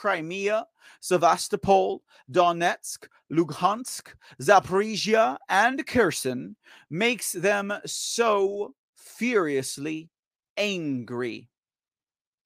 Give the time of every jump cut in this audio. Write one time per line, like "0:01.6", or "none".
none